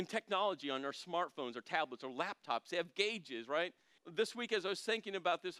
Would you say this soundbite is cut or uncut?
cut